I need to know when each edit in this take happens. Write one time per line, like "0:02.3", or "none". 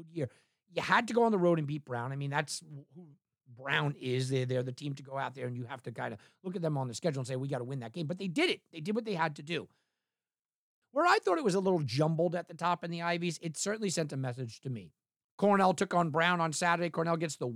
0:10.8